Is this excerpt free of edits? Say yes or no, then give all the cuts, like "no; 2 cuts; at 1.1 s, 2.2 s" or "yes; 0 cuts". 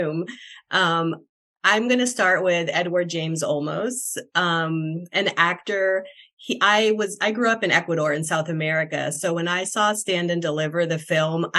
yes; 0 cuts